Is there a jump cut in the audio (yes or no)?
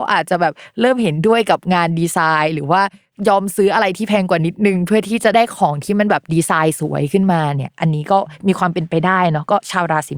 no